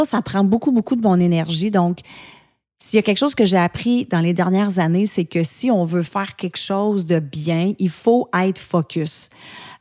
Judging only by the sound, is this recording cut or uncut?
uncut